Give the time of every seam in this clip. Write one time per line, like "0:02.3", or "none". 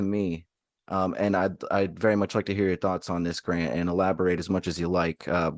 none